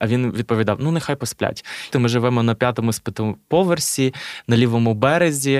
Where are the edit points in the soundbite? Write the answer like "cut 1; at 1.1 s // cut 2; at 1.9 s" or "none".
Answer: cut 1; at 1.9 s